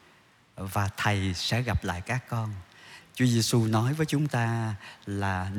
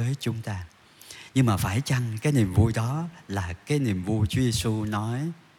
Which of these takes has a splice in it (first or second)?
first